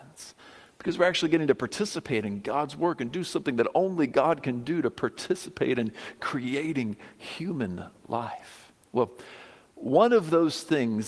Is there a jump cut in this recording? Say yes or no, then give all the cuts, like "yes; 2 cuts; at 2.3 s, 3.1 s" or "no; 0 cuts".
no; 0 cuts